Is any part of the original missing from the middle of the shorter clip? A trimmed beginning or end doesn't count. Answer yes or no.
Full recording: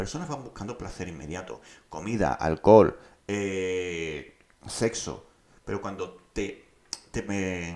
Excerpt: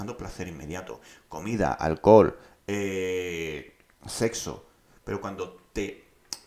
no